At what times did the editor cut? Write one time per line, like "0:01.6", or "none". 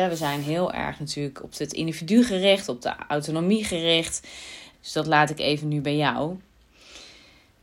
0:04.7